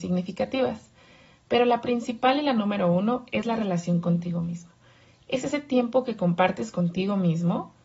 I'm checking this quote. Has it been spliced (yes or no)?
no